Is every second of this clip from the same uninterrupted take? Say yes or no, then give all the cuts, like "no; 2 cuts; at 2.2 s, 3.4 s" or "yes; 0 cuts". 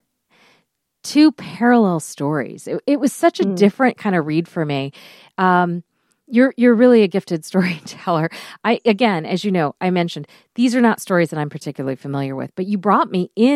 yes; 0 cuts